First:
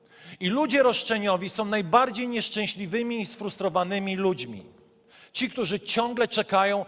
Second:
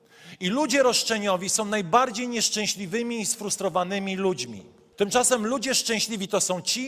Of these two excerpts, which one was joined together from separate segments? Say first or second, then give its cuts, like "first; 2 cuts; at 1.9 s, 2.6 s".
second; 1 cut; at 4.9 s